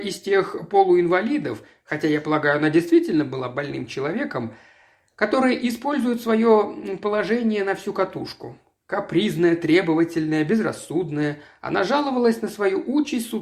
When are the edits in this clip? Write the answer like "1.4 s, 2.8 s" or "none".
none